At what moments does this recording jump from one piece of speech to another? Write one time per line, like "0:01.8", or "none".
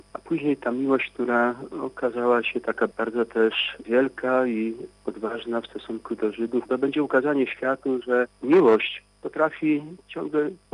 0:06.7